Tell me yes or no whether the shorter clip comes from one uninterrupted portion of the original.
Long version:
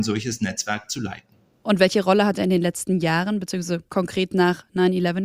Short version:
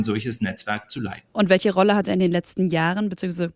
no